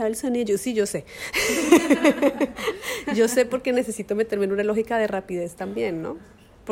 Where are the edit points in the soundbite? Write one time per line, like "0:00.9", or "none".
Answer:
none